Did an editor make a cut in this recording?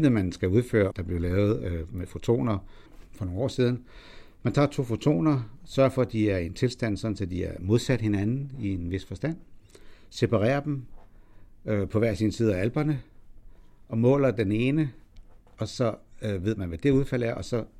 yes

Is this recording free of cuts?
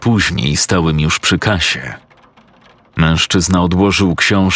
yes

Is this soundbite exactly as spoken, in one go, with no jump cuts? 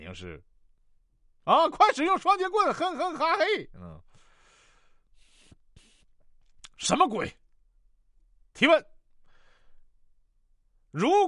yes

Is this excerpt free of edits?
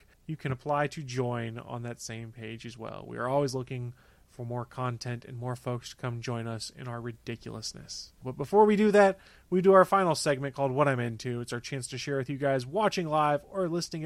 no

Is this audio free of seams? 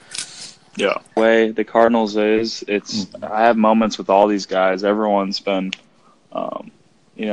no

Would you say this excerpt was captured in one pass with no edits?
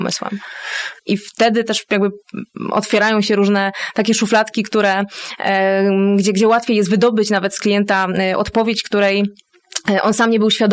no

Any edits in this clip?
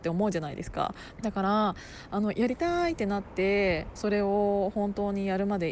yes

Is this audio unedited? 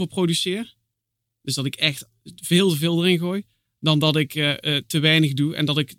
yes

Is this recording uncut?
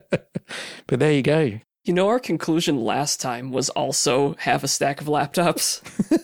yes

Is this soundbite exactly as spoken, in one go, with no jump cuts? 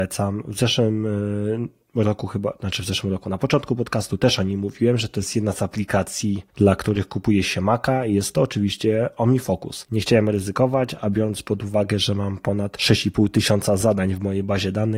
no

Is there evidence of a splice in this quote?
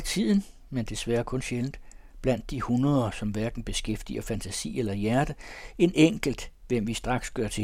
no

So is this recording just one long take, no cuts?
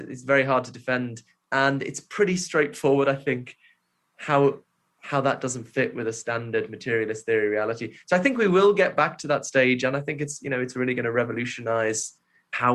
yes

